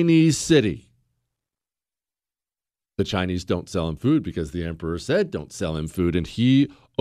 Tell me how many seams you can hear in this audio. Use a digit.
0